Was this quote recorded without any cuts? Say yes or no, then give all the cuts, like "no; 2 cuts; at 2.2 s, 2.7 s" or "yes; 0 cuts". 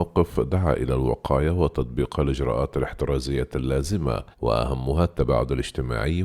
no; 1 cut; at 4.3 s